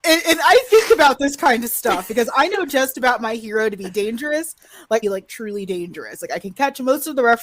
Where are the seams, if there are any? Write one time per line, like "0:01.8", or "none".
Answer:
0:05.0

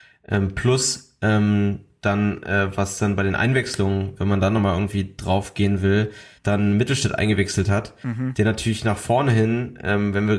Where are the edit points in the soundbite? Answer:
0:06.4

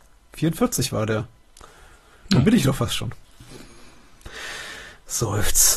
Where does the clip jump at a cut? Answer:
none

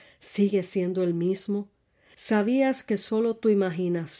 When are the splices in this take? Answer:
0:02.1

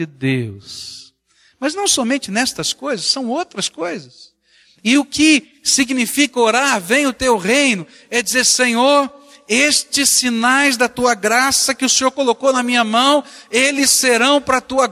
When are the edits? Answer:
none

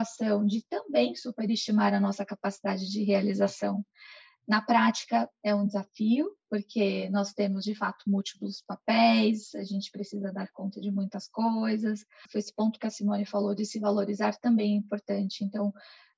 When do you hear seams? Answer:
0:12.3

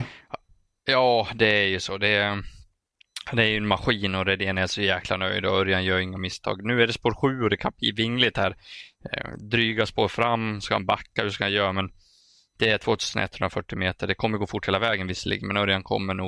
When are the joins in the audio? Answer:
none

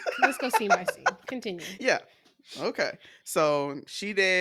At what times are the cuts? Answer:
none

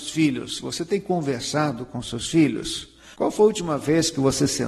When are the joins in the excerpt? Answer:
0:03.1

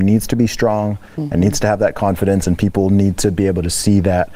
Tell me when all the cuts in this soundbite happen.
none

